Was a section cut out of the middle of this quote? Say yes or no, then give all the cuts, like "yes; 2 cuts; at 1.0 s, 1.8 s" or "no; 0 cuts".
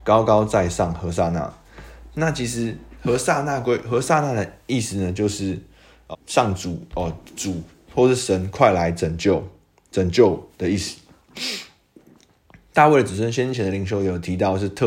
yes; 2 cuts; at 6.1 s, 11.3 s